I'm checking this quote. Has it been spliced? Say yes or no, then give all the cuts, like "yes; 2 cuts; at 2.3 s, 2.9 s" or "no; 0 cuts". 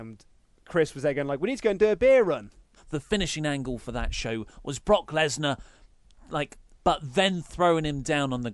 yes; 2 cuts; at 2.8 s, 6.7 s